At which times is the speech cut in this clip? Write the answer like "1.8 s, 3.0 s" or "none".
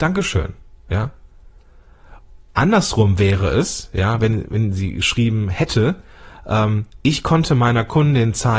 none